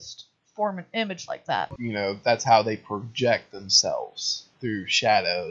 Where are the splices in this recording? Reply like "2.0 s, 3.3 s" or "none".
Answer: 1.8 s